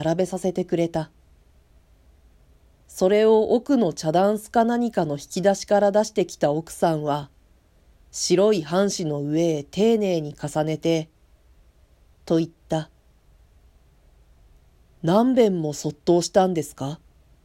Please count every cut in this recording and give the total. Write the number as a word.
one